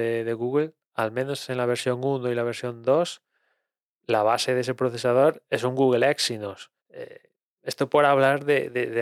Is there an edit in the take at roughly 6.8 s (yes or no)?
yes